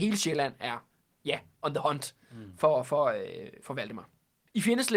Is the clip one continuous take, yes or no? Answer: yes